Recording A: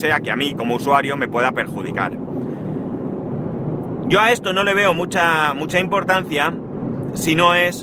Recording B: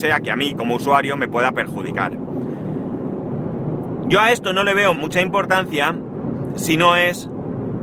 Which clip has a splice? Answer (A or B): B